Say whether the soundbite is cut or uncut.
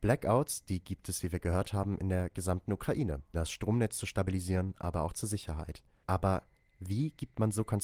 cut